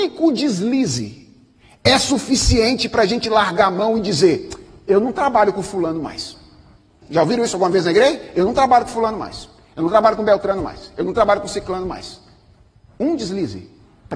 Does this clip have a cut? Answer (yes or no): yes